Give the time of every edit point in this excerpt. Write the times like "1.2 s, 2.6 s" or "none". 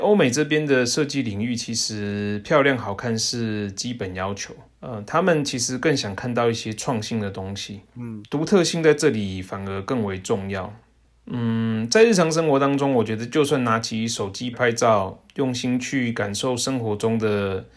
14.5 s

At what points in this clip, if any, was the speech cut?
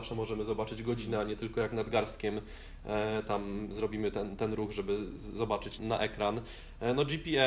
5.8 s

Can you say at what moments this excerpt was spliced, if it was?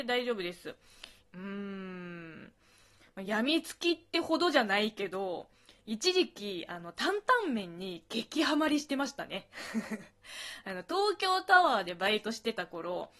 1.2 s

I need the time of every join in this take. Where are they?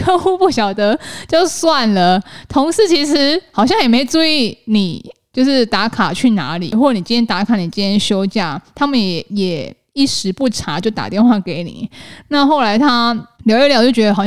13.4 s

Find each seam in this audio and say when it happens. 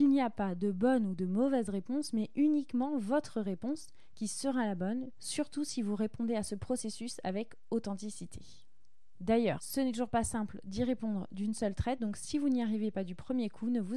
none

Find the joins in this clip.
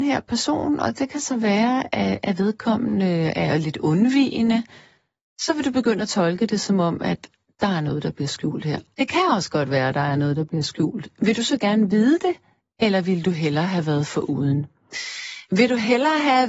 8.9 s

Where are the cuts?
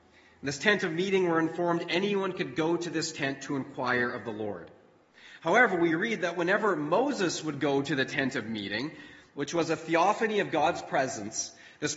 9.3 s

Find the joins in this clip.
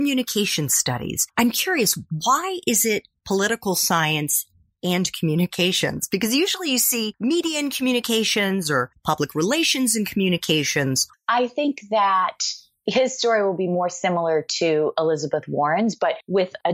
3.2 s, 11.1 s

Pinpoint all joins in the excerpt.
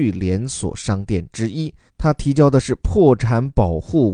1.9 s

